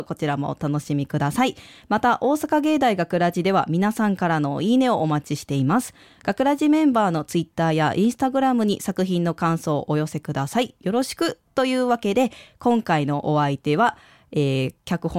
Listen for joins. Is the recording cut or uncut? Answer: uncut